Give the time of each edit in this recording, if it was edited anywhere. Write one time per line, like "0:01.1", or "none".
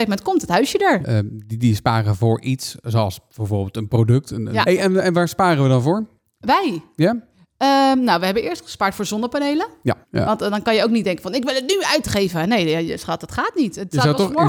0:01.0
0:04.6
0:10.0